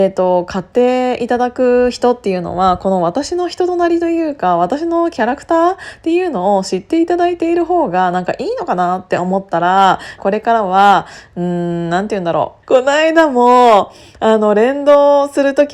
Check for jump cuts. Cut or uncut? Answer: cut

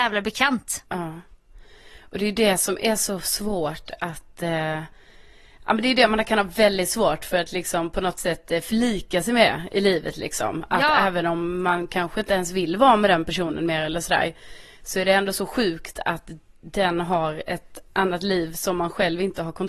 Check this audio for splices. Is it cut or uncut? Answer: uncut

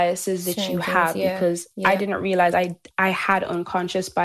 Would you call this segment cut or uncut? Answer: uncut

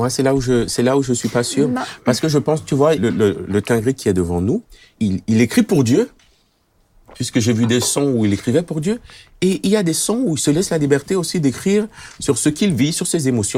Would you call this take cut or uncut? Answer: cut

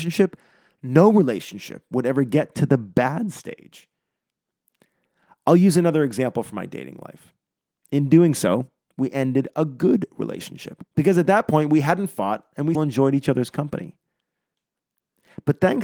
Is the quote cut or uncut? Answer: cut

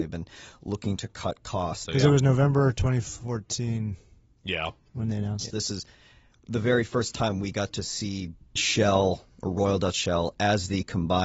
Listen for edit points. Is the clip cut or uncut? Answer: cut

